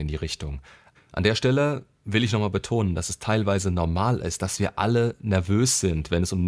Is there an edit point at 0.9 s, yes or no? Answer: yes